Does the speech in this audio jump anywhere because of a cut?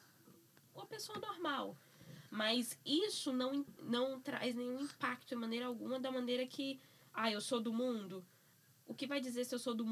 yes; 1 cut; at 3.8 s

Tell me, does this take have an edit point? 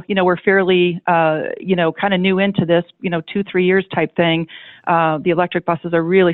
no; 0 cuts

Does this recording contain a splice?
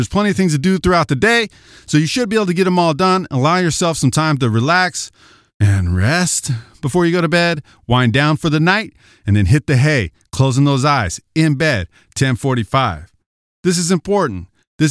no; 0 cuts

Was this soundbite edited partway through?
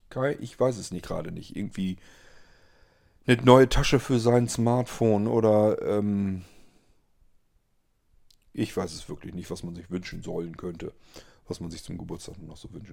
no; 0 cuts

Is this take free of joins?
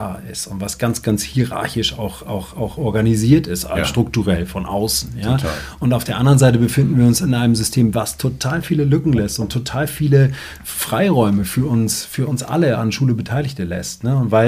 yes; 0 cuts

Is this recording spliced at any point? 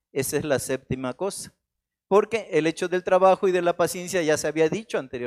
no; 0 cuts

